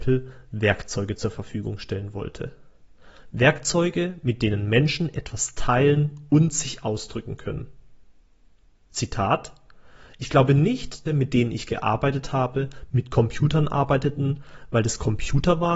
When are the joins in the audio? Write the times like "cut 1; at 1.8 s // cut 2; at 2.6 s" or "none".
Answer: cut 1; at 11.1 s

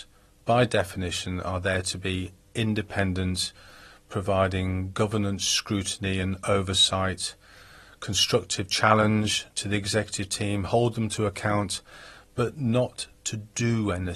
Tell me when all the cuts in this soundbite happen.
none

